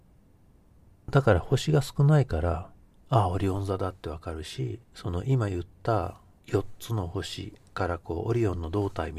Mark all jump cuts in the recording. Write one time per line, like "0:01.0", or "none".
0:04.8
0:06.4

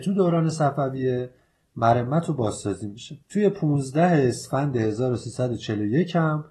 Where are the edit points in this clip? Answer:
0:03.2

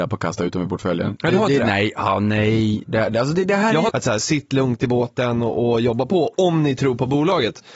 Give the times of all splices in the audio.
0:03.9

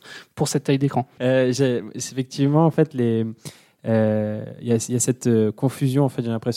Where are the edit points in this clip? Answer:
0:01.2

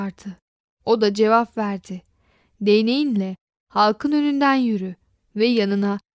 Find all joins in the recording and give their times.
none

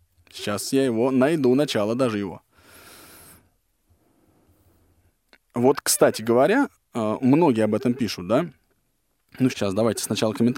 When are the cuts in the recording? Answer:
0:09.5

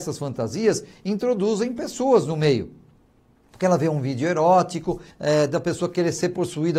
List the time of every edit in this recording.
0:05.1

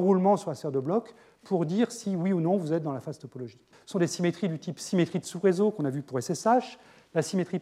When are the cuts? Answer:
0:03.7

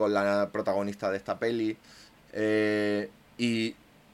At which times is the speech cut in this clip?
none

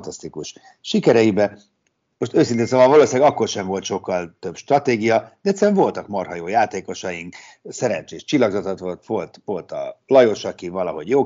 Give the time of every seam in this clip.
none

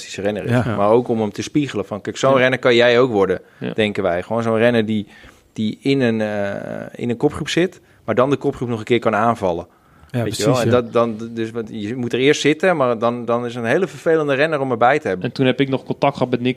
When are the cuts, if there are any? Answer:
0:15.2

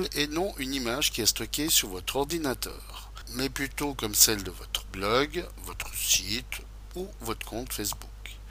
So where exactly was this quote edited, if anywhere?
none

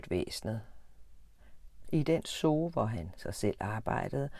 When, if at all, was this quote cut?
0:01.8

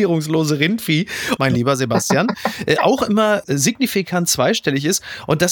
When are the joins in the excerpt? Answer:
0:01.4

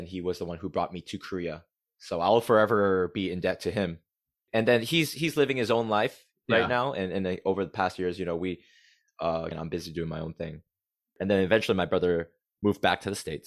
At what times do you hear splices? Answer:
0:09.5

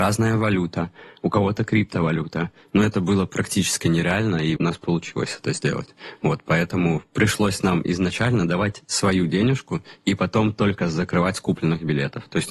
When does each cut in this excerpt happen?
0:04.6

